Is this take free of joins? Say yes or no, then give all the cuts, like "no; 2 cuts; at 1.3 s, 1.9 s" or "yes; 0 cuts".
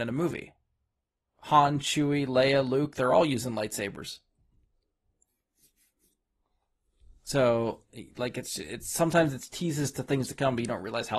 yes; 0 cuts